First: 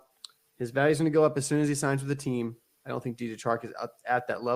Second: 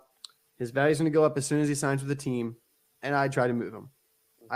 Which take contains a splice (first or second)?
first